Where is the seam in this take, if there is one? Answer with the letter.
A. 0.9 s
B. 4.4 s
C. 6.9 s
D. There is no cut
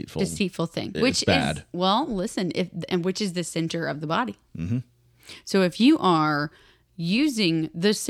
A